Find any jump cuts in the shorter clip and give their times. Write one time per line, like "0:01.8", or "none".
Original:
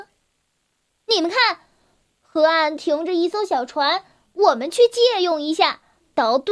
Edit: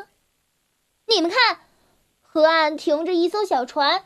none

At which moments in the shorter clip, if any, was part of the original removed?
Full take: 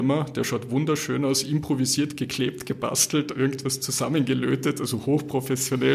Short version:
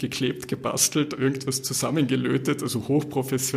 none

